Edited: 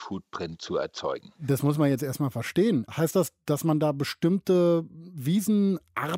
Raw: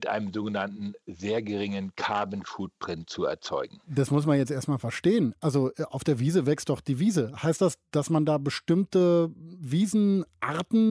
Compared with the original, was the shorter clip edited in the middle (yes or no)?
yes